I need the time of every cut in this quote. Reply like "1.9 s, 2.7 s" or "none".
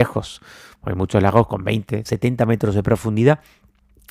2.0 s